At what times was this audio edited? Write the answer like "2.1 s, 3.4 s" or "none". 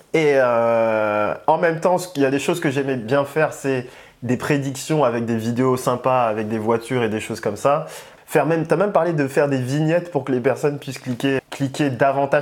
8.2 s, 11.4 s